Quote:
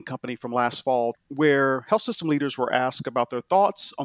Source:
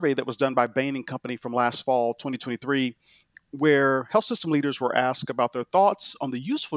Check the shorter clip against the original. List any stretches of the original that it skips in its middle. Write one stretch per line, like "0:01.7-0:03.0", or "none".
0:02.2-0:03.4